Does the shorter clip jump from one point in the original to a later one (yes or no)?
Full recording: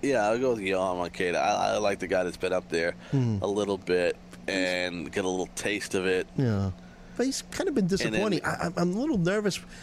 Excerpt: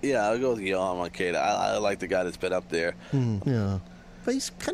yes